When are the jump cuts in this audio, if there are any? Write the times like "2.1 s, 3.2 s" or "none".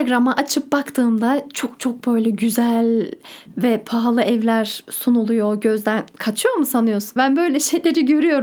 7.2 s